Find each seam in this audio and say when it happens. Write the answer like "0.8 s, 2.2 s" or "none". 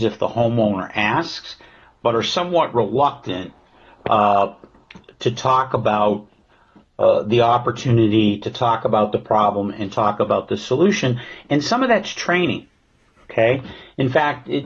none